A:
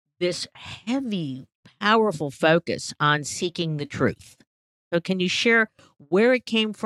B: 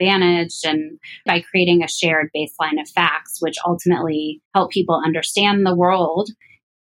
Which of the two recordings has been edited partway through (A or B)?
B